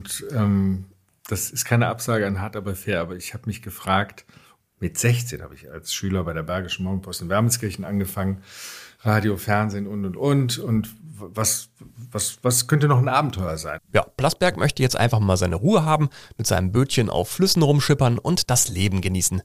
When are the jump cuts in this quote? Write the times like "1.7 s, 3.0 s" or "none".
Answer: 13.8 s